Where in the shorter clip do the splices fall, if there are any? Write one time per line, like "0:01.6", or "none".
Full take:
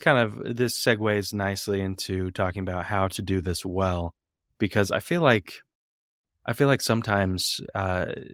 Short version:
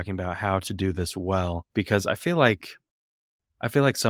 0:01.7